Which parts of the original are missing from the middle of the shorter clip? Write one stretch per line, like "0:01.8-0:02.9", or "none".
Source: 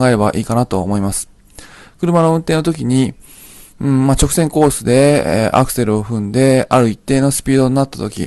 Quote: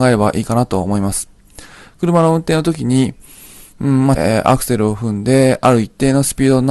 0:04.2-0:05.2